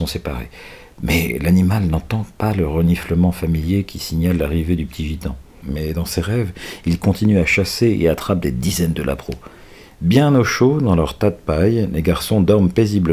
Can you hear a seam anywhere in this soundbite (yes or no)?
yes